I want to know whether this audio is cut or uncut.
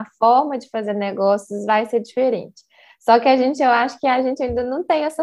uncut